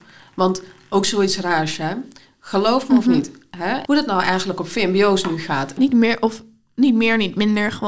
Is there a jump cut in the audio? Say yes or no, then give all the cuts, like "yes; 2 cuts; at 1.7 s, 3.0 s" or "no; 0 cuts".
yes; 2 cuts; at 3.9 s, 5.8 s